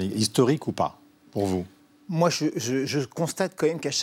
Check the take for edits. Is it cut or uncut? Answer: uncut